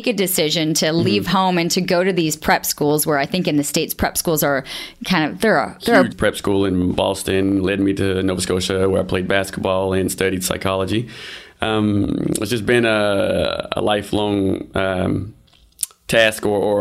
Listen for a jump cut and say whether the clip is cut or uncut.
cut